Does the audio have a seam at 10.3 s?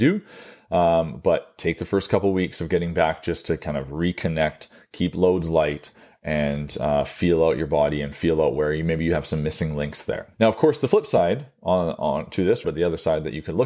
yes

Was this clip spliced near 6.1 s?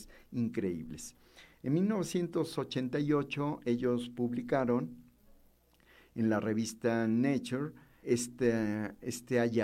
no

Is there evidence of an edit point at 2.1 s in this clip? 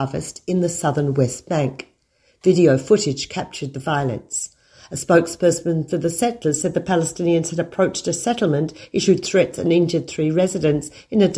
no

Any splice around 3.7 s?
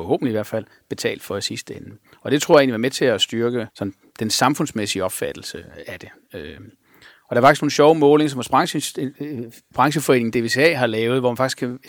yes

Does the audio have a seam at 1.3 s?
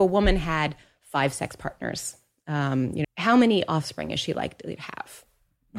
no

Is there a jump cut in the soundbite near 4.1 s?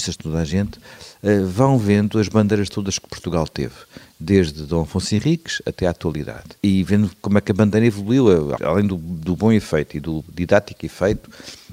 no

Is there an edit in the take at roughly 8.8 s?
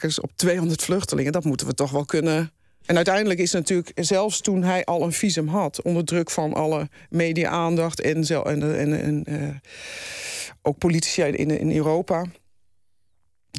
no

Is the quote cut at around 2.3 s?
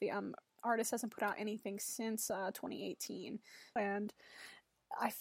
no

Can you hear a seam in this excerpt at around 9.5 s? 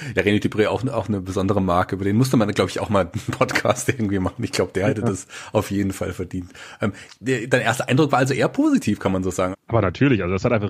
yes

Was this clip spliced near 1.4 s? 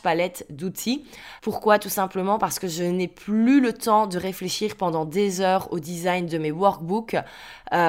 yes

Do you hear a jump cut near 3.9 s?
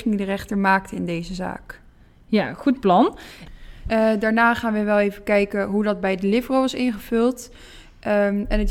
yes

